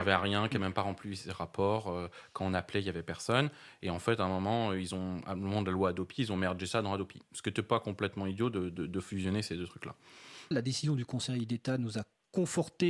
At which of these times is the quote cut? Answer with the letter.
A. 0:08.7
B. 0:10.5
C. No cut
B